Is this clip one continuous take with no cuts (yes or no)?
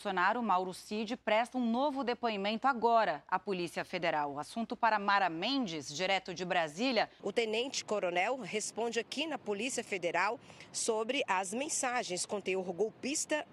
no